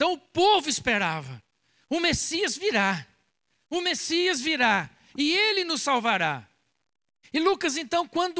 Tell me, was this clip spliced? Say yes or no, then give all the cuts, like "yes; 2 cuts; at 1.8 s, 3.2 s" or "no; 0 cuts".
yes; 1 cut; at 7.2 s